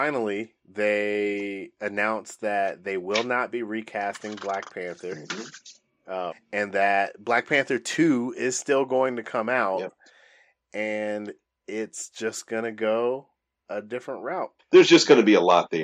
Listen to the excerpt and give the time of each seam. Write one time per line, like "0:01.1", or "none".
0:06.3
0:14.6

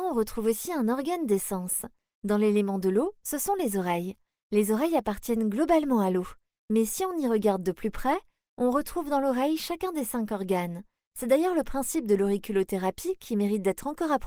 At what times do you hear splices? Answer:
none

